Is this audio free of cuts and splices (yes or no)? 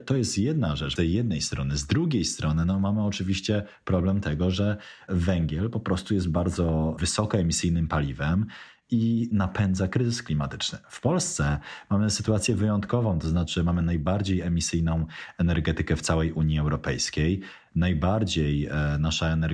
no